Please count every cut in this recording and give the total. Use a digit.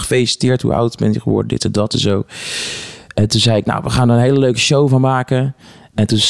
0